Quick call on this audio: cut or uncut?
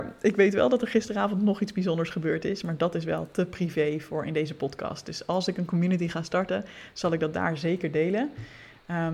uncut